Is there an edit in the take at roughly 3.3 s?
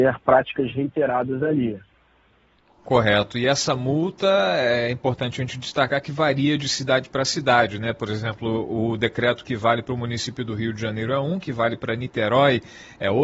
no; 0 cuts

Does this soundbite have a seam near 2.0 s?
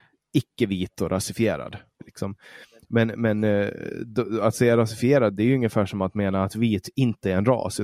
yes; 1 cut; at 2.0 s

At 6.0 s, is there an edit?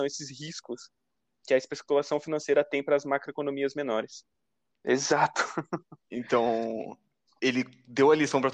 no; 1 cut; at 4.7 s

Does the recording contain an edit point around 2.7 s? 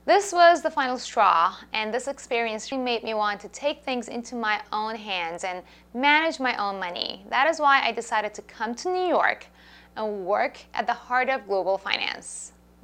yes; 1 cut; at 2.7 s

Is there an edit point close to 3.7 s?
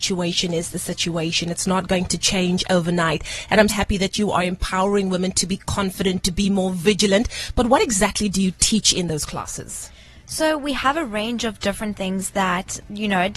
yes; 1 cut; at 3.7 s

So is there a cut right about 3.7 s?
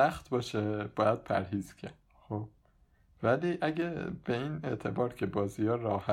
no; 1 cut; at 2.0 s

